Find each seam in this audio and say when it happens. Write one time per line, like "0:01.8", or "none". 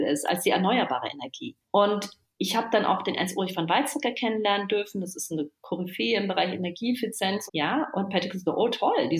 0:01.6
0:07.5